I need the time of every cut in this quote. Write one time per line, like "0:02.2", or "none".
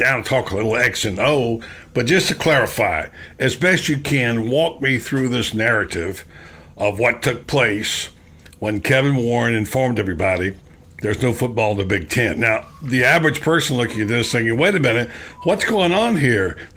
none